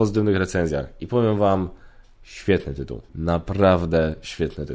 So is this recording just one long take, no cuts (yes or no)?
no